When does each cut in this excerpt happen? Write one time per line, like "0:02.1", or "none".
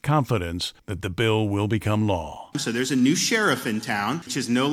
0:02.5